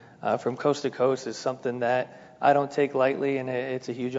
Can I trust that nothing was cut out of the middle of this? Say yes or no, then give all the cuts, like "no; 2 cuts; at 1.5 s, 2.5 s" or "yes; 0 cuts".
yes; 0 cuts